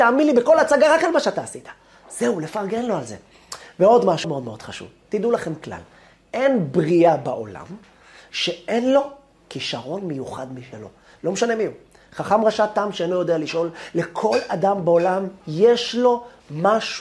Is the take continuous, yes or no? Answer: no